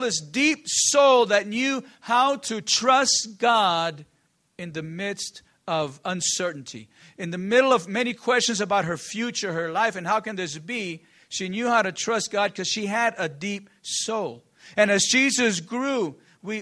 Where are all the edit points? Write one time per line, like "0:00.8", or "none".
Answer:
none